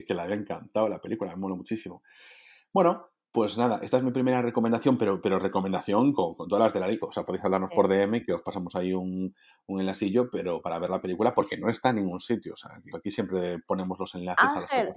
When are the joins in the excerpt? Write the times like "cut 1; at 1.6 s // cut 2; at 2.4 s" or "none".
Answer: cut 1; at 7.0 s // cut 2; at 12.9 s